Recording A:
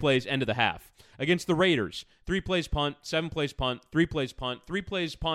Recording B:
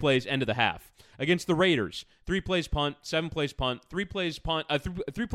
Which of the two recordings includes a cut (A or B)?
B